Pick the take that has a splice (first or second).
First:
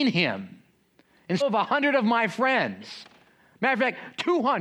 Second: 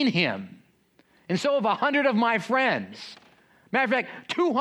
first